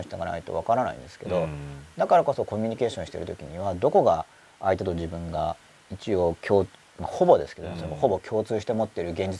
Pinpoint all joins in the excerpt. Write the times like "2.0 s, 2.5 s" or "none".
none